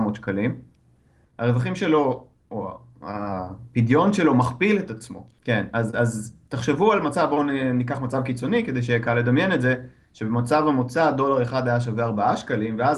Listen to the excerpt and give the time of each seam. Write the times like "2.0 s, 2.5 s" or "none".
1.2 s, 5.4 s